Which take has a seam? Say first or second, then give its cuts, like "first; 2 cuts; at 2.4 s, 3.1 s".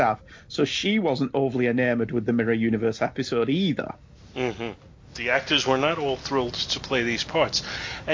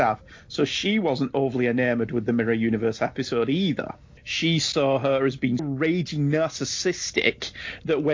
second; 2 cuts; at 4.2 s, 5.6 s